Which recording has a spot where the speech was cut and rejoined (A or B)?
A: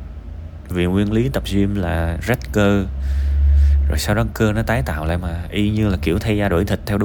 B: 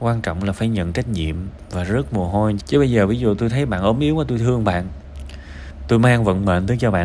B